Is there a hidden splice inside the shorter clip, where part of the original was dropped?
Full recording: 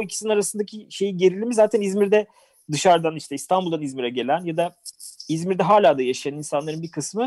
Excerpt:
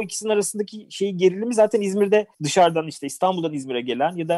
yes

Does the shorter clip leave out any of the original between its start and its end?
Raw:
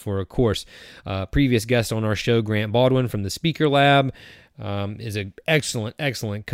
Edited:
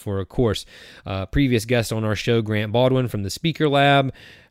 no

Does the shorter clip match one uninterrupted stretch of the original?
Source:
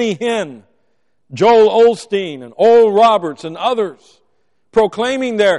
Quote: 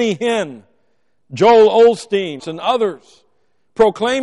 no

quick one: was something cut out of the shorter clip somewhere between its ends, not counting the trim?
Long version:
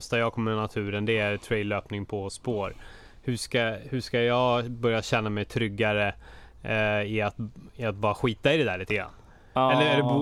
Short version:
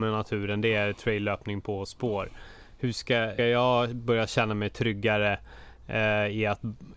yes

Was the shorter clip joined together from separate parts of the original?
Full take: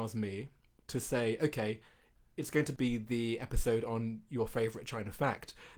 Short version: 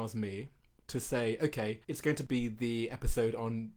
yes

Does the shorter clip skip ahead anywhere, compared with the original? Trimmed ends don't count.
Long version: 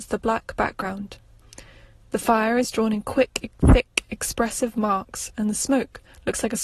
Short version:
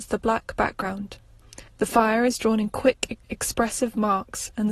yes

